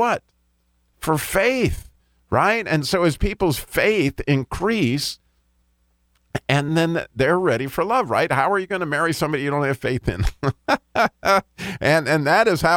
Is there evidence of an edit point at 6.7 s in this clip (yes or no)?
yes